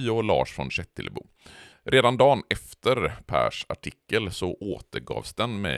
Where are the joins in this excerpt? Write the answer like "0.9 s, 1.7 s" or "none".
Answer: 1.7 s